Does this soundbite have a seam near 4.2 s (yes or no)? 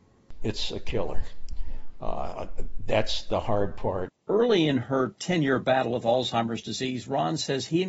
yes